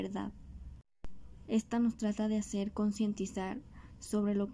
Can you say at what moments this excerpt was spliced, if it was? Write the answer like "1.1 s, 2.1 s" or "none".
1.5 s